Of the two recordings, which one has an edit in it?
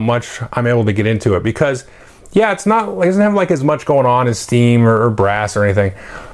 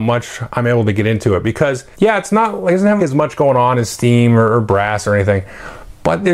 second; 2 cuts; at 1.9 s, 3.0 s

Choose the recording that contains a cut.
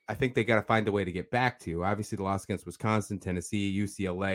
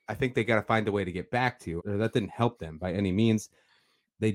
second; 1 cut; at 1.8 s

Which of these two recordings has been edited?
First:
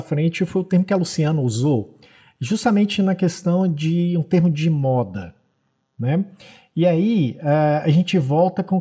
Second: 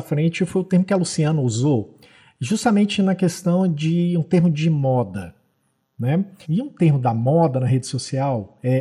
second; 1 cut; at 6.4 s

